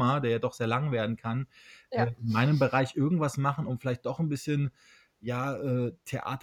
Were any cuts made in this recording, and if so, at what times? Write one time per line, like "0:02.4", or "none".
none